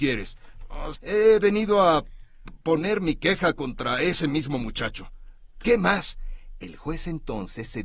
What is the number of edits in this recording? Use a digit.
2